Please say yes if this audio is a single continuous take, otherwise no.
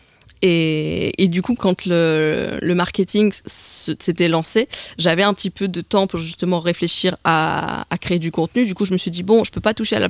yes